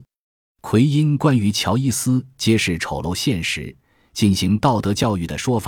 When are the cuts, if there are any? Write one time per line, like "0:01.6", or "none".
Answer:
none